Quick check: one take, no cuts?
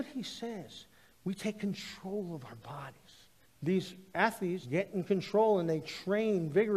no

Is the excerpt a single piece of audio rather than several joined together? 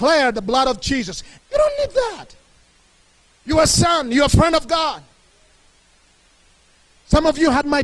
no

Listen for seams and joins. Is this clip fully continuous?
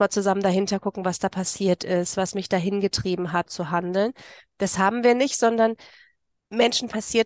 no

